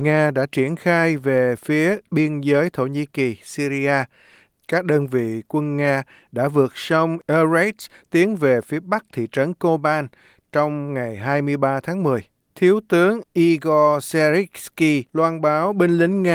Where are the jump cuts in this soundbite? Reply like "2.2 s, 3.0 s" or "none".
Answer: 12.5 s, 15.1 s